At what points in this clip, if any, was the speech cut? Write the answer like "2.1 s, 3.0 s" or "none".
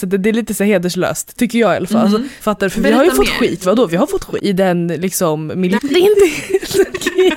2.4 s, 4.4 s, 5.8 s